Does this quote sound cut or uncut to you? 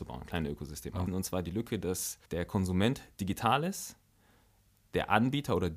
cut